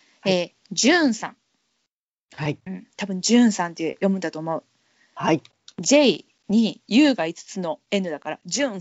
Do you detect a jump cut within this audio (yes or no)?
no